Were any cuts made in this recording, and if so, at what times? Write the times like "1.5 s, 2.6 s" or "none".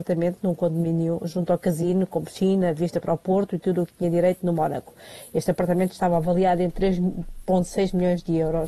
none